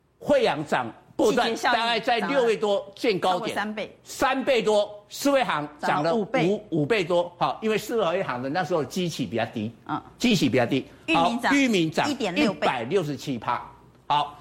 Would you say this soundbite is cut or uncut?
uncut